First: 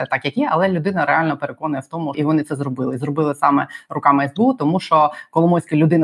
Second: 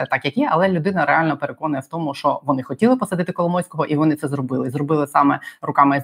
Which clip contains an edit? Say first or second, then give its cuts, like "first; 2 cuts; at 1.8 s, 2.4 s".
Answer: first; 1 cut; at 2.1 s